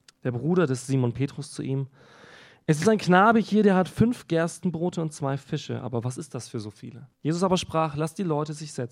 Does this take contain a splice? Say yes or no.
yes